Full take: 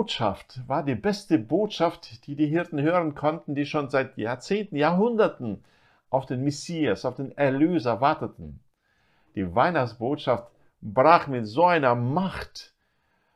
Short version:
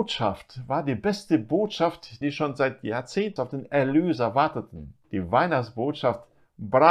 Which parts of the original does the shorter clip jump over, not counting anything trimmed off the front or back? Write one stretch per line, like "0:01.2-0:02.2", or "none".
0:02.2-0:03.5
0:04.7-0:07.0
0:08.7-0:09.3

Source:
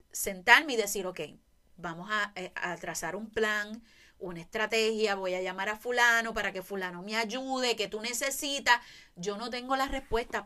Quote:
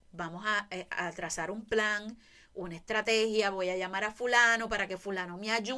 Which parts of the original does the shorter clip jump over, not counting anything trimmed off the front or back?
none

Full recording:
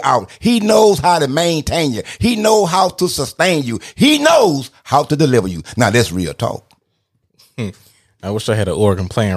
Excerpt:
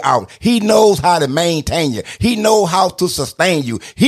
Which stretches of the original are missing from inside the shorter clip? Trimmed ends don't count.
none

